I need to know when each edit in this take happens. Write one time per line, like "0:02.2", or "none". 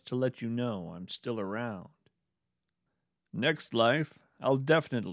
none